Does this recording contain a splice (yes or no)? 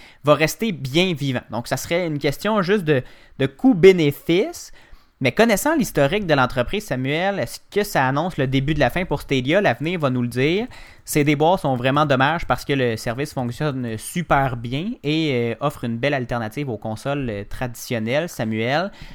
no